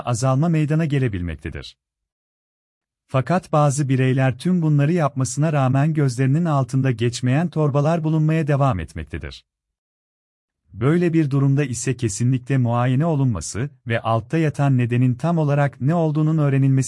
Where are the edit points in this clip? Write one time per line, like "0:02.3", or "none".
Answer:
0:02.9

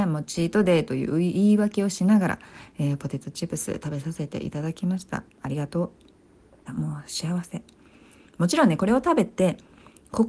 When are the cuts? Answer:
0:06.7

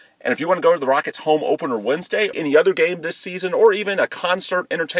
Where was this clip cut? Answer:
0:02.3

